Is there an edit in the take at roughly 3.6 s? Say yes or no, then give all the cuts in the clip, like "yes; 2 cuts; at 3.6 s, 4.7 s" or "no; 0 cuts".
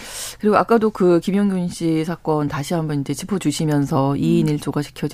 no; 0 cuts